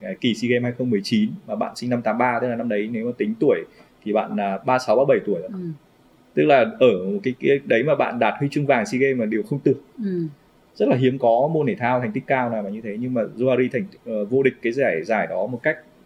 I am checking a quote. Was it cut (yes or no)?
no